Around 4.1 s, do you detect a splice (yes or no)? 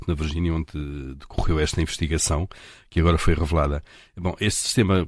no